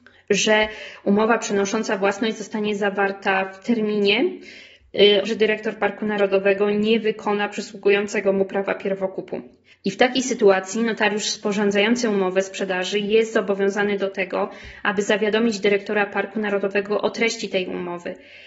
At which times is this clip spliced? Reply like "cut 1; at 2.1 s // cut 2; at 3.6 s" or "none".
cut 1; at 5.2 s // cut 2; at 9.7 s

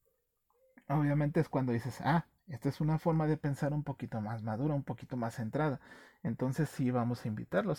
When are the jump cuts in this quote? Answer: none

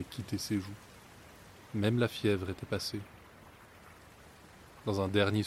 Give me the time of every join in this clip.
none

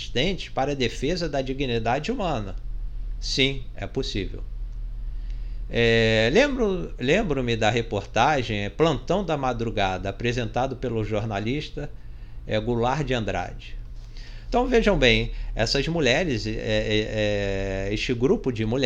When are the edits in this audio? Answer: cut 1; at 14.5 s

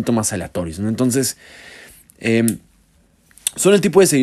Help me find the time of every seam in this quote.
none

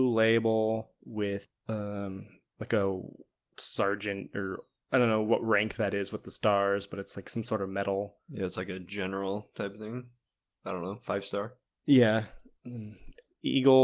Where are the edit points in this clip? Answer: none

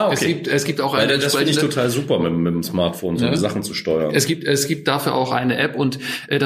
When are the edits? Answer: none

